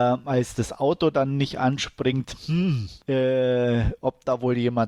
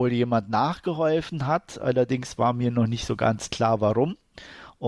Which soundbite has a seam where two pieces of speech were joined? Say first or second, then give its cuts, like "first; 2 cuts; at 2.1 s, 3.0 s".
first; 1 cut; at 3.0 s